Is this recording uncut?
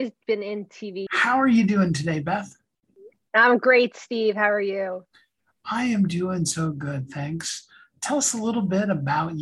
no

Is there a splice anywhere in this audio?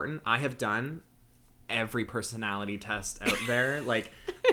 no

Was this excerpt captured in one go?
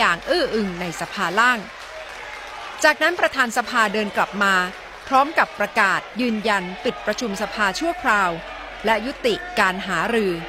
yes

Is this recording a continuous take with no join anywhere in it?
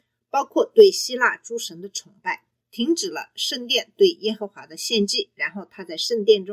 no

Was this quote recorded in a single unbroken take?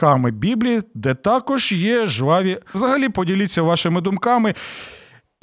no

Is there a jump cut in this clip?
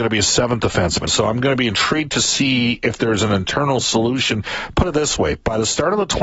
yes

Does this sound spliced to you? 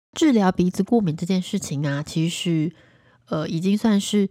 no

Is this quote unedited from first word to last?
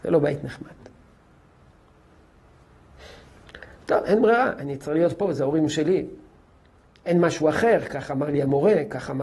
yes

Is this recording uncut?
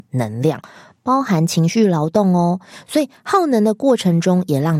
yes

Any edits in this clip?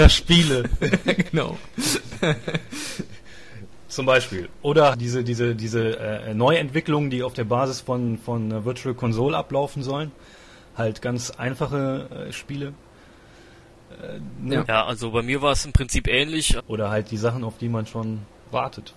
yes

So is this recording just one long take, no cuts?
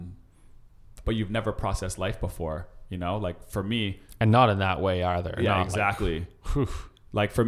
no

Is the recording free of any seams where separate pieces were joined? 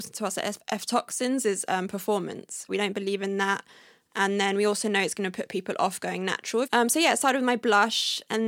no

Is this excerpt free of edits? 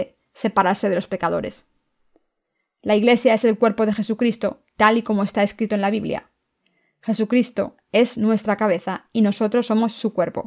yes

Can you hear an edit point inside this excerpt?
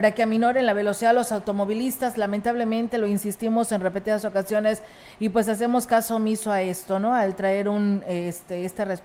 no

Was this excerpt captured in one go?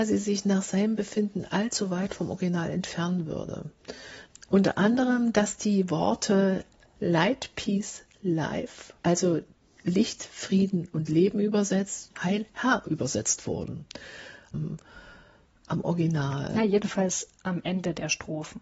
no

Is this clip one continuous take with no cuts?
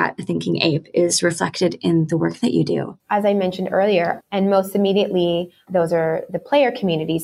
no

